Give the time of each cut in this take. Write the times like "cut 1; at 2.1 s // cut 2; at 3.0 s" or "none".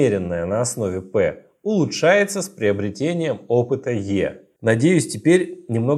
none